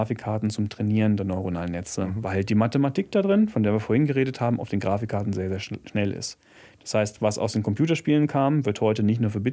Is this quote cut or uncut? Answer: uncut